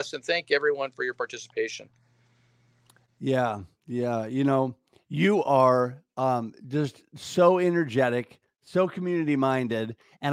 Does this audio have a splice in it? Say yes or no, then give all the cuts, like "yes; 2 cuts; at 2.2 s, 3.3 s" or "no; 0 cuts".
no; 0 cuts